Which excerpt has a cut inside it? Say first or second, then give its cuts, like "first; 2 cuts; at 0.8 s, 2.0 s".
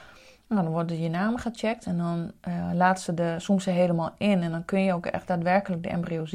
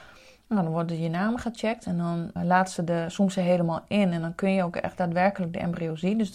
second; 1 cut; at 2.4 s